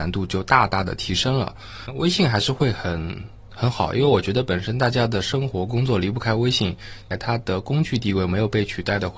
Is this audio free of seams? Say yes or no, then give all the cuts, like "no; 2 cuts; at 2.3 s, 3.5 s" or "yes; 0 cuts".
no; 1 cut; at 7.1 s